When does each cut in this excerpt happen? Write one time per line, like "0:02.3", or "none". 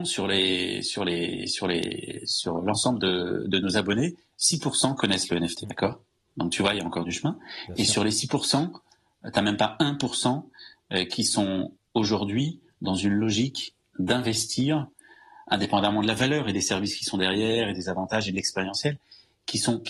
0:05.6